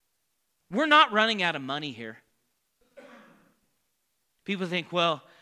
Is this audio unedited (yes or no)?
no